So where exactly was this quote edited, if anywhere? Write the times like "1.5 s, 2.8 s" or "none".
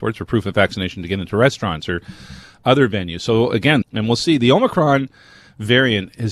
3.8 s